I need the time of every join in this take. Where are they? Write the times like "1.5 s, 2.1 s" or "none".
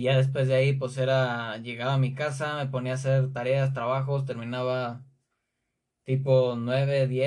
none